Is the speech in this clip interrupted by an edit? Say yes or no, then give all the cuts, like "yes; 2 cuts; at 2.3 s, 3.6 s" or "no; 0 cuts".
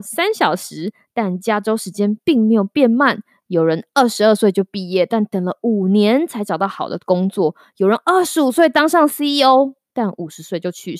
no; 0 cuts